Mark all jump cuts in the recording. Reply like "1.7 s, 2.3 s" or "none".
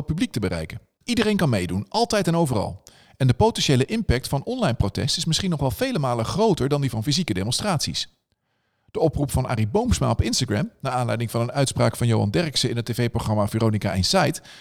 1.0 s